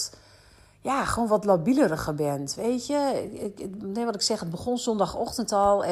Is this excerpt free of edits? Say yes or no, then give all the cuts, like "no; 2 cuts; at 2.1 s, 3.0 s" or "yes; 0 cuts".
yes; 0 cuts